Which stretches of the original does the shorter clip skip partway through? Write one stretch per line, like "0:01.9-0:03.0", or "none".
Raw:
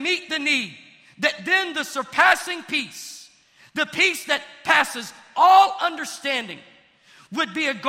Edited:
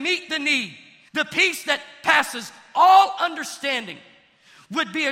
0:01.1-0:03.7